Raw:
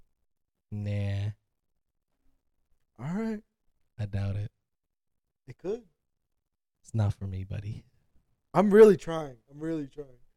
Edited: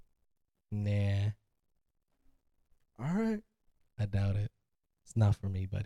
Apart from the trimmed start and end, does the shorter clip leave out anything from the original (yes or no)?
yes